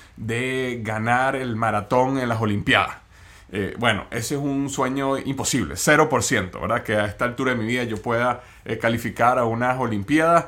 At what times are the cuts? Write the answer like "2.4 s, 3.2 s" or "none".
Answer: none

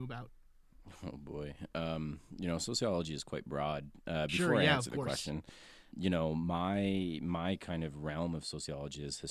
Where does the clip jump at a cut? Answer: 5.9 s

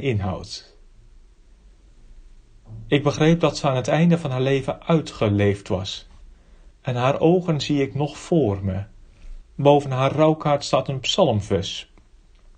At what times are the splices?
6.7 s, 9.4 s

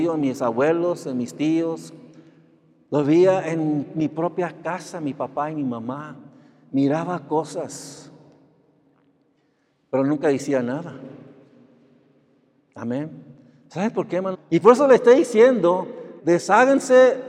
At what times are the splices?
14.3 s, 16.2 s

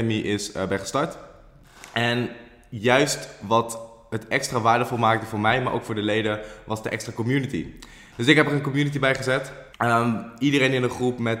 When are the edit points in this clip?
9.7 s

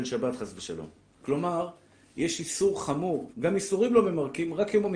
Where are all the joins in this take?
1.2 s, 3.3 s

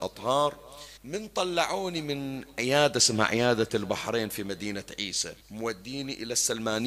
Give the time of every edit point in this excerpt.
1.0 s, 5.4 s

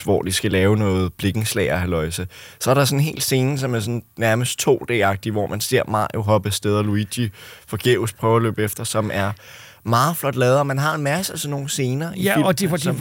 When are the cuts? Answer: none

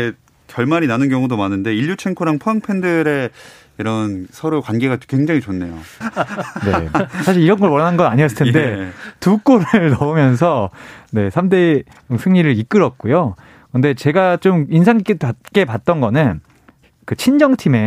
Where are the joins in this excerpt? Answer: 6.0 s

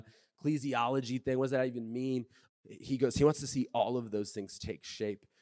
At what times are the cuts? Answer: 2.5 s

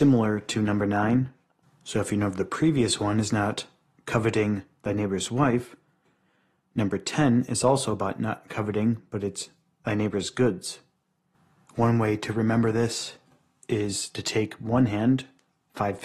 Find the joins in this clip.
11.6 s

